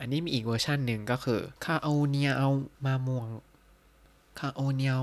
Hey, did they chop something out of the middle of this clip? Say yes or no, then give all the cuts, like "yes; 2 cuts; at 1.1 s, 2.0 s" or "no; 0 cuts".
yes; 2 cuts; at 1.6 s, 2.7 s